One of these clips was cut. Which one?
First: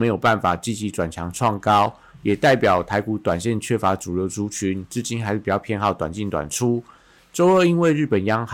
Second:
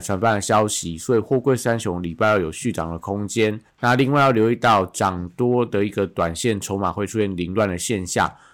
second; 1 cut; at 3.7 s

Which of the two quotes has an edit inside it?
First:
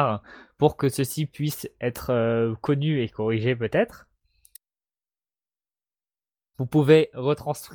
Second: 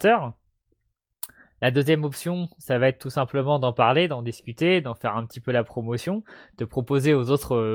first; 1 cut; at 6.5 s

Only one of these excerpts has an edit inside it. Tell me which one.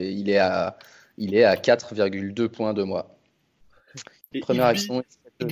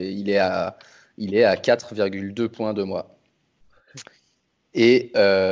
first; 1 cut; at 4.2 s

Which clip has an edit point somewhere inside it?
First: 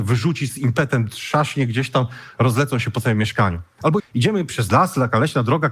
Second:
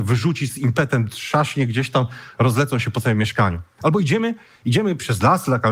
first; 1 cut; at 4.0 s

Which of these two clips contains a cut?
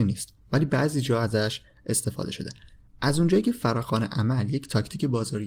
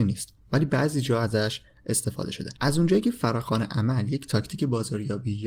second; 1 cut; at 2.6 s

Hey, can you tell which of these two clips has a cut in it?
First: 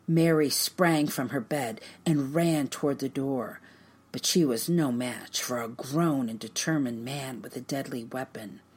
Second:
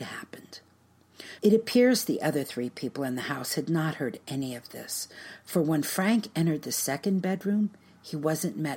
second; 1 cut; at 1.4 s

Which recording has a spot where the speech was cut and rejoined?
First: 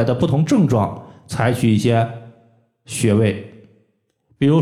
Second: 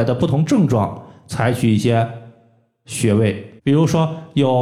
second; 1 cut; at 3.6 s

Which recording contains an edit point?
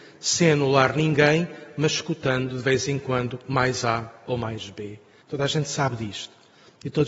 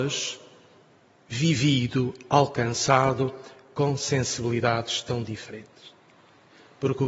first; 1 cut; at 5.2 s

